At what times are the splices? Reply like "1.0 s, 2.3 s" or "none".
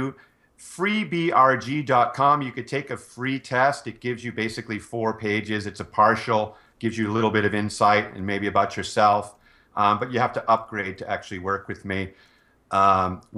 none